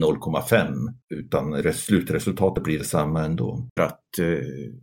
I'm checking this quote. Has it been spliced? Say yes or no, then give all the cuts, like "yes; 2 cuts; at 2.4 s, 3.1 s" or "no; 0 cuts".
yes; 2 cuts; at 1.0 s, 3.8 s